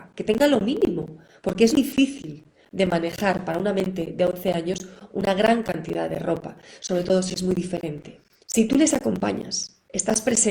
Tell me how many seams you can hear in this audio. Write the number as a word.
two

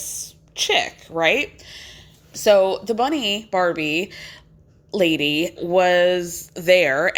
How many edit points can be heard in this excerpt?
two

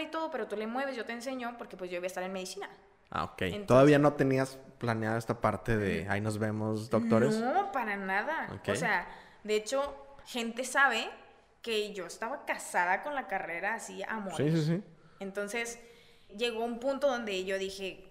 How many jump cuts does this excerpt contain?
two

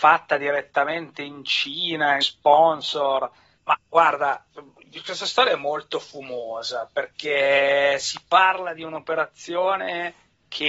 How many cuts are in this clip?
two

